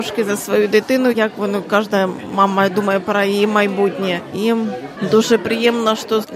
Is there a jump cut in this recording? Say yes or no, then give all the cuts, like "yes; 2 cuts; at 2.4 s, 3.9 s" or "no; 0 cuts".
no; 0 cuts